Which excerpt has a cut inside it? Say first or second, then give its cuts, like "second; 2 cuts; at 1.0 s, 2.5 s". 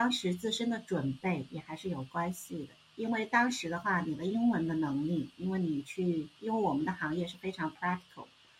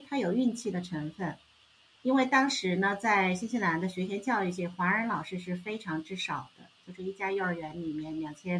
second; 1 cut; at 2.0 s